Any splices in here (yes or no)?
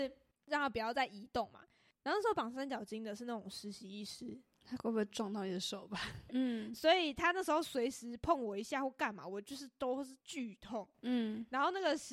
yes